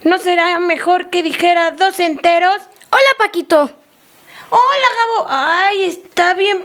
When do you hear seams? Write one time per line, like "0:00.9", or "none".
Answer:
none